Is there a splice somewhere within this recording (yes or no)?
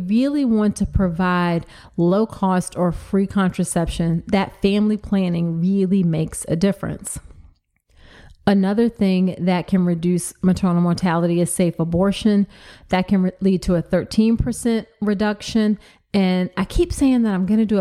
no